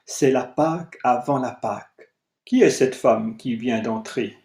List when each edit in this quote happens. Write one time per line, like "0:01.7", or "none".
0:02.4